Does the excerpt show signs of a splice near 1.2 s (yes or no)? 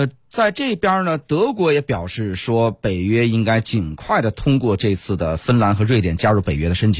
no